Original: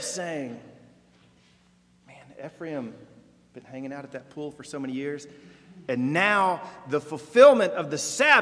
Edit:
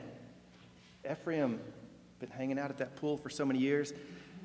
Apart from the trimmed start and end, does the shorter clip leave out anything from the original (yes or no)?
yes